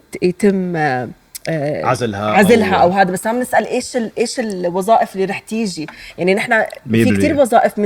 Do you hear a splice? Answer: no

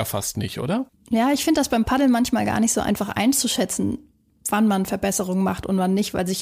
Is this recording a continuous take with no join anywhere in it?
no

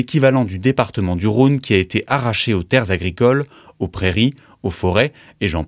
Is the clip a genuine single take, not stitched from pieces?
yes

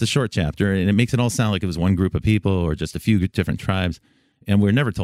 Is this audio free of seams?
yes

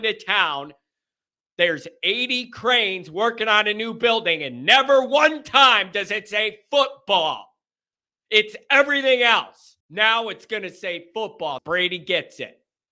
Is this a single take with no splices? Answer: no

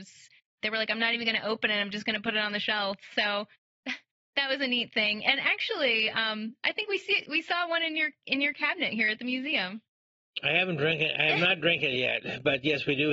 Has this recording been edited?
no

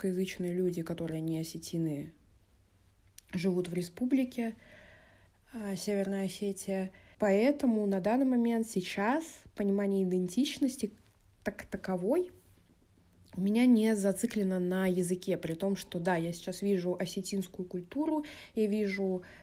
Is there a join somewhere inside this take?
yes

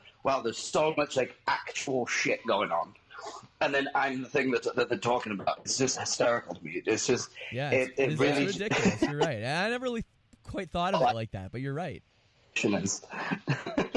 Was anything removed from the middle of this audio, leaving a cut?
yes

